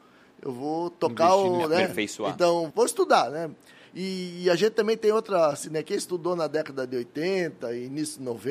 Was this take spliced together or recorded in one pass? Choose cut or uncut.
cut